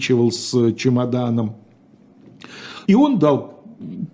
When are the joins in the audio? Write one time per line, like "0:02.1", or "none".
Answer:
0:02.8